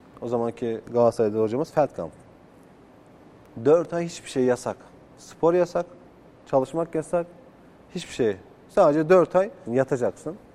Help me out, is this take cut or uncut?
cut